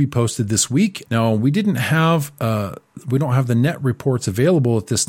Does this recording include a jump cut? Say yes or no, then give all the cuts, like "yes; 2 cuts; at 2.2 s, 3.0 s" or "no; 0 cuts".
yes; 1 cut; at 1.1 s